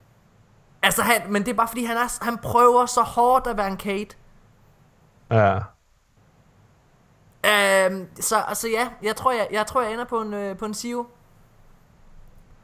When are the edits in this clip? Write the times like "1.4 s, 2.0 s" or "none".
none